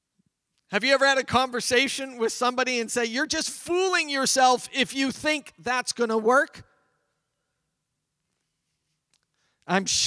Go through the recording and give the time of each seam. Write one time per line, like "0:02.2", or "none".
none